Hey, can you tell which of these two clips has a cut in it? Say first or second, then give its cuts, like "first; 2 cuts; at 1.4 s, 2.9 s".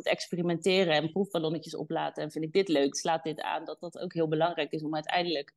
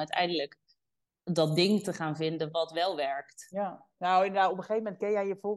first; 1 cut; at 2.9 s